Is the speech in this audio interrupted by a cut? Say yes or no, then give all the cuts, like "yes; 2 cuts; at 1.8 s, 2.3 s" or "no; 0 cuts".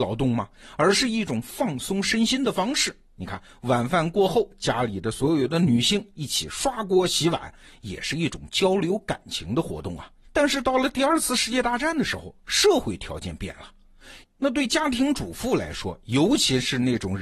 yes; 2 cuts; at 10.2 s, 14.2 s